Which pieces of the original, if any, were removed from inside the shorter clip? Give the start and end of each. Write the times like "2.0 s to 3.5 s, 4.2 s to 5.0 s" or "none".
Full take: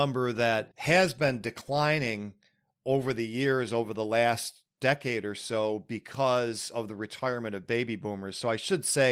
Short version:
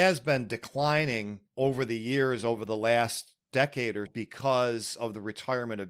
2.4 s to 2.8 s, 5.3 s to 5.8 s